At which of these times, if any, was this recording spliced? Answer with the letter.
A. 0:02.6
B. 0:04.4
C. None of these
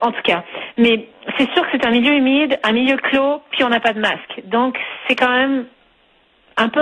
C